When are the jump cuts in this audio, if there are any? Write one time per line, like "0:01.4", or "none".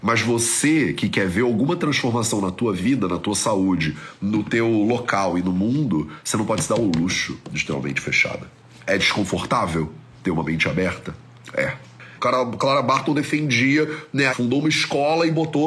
0:12.2
0:14.3